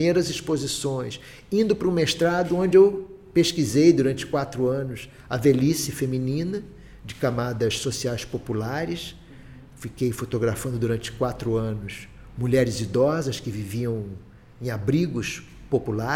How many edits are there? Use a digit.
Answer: 0